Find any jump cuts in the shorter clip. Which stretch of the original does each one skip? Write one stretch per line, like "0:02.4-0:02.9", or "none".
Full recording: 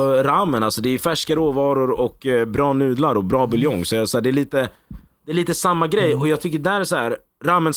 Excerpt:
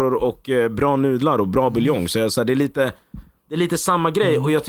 none